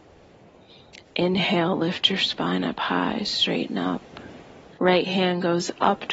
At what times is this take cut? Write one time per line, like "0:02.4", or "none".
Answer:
0:01.0
0:04.8